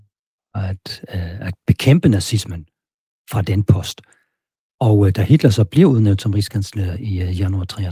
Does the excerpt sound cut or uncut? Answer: uncut